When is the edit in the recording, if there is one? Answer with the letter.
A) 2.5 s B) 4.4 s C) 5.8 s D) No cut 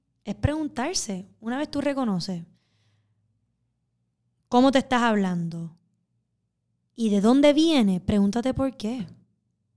D